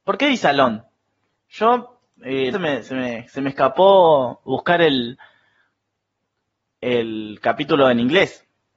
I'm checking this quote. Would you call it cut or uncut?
cut